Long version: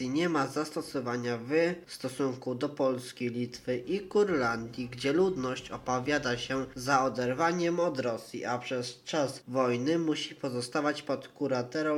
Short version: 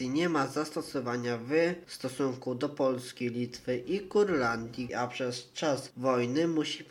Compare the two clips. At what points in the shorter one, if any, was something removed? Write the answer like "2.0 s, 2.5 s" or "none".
4.9 s